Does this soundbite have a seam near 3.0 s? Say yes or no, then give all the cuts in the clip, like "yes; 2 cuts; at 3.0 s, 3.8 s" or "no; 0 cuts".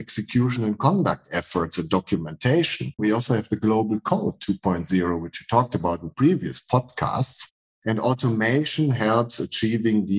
yes; 1 cut; at 3.0 s